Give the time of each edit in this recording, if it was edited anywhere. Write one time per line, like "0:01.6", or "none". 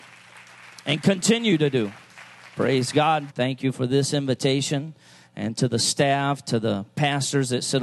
0:03.3